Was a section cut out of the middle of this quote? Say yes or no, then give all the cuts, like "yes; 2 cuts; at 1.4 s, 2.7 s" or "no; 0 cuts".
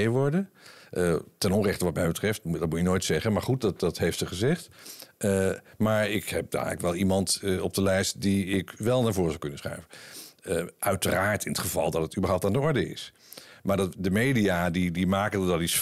no; 0 cuts